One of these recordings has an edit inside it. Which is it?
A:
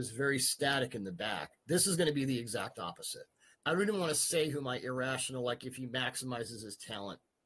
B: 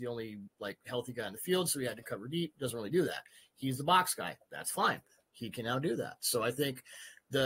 A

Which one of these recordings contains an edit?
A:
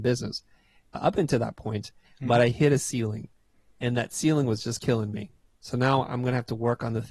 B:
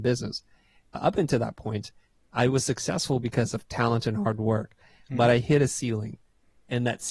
A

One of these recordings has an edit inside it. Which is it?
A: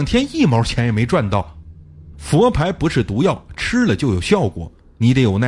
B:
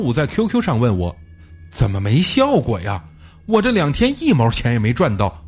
A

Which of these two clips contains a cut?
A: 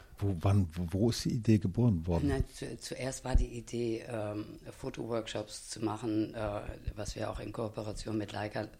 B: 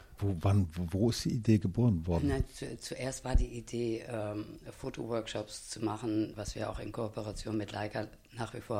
B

